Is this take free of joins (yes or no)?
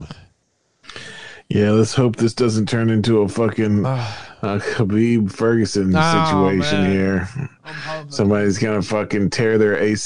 yes